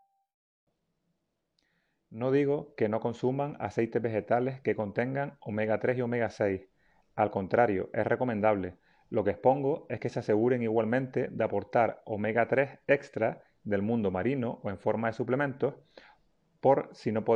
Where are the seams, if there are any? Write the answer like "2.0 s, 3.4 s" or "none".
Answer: none